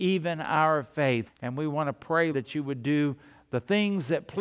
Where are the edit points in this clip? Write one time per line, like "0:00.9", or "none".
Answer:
0:01.3
0:02.3